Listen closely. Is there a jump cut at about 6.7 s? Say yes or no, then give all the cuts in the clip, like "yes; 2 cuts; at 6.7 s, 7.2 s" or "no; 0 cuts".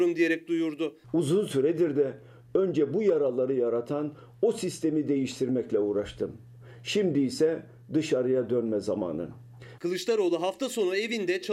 no; 2 cuts; at 1.0 s, 9.8 s